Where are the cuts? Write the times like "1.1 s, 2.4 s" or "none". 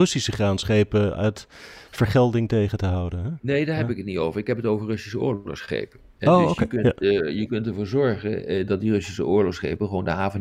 none